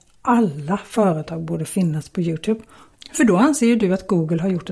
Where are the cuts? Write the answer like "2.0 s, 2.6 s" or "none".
2.9 s